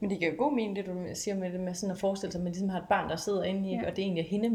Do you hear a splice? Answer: no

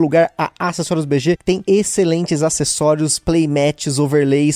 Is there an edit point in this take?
no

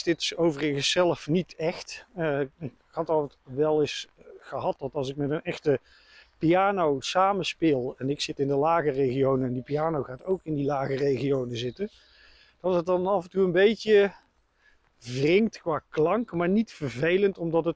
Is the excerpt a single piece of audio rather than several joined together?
yes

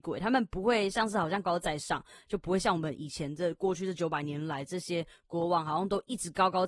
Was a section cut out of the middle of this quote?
yes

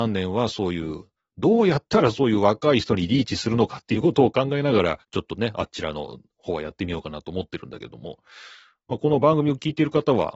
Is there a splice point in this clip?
yes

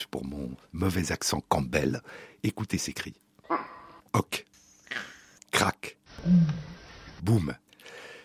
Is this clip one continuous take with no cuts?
yes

